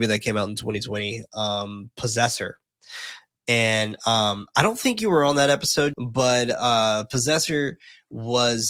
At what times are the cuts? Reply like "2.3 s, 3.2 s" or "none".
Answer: 5.9 s